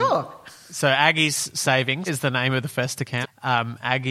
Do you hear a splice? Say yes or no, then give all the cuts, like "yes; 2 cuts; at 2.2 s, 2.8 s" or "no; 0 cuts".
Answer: yes; 2 cuts; at 2.1 s, 3.2 s